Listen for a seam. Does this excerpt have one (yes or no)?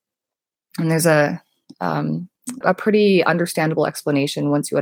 yes